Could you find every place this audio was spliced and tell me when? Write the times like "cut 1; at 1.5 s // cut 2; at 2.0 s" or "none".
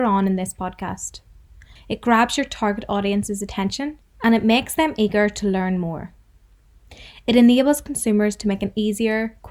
cut 1; at 1.8 s // cut 2; at 7.1 s